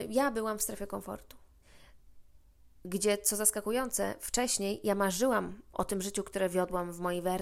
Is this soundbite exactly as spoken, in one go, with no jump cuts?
no; 1 cut; at 5.7 s

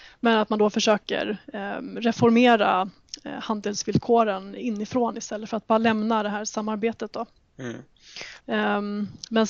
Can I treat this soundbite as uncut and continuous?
no; 1 cut; at 8.4 s

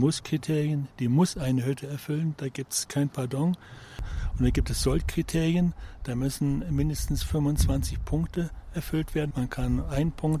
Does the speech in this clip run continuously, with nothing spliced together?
no; 1 cut; at 9.3 s

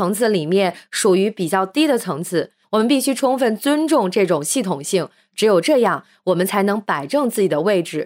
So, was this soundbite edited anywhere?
yes; 1 cut; at 2.6 s

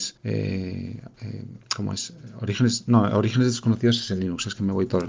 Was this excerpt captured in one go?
yes; 0 cuts

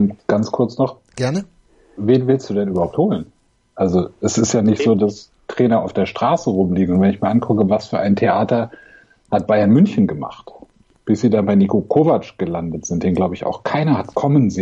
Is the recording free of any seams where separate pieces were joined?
yes; 0 cuts

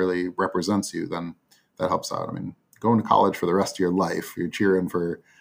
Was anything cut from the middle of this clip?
no; 0 cuts

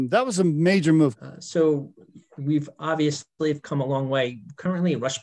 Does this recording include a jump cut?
yes; 1 cut; at 1.2 s

